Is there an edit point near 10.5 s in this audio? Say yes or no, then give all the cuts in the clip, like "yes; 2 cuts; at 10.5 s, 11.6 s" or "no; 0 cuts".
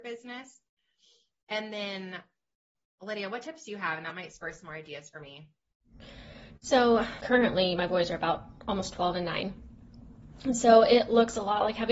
no; 1 cut; at 7.2 s